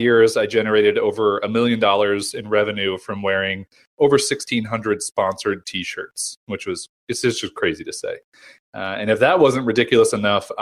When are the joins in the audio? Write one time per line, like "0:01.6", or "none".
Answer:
none